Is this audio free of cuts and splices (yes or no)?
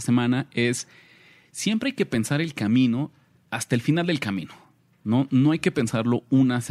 yes